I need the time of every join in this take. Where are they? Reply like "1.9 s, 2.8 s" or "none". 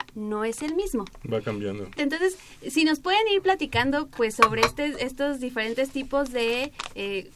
2.0 s